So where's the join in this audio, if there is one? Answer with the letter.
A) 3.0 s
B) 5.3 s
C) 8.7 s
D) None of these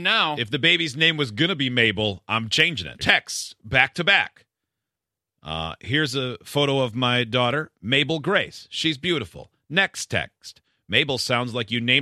A